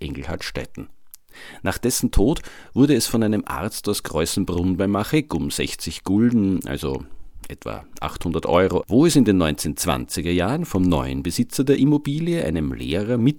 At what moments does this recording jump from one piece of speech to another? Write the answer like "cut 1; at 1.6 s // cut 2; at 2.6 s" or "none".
cut 1; at 8.8 s